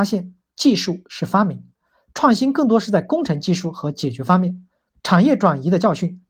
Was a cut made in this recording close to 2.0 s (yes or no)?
no